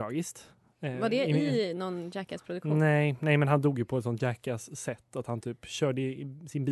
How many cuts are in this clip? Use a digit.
0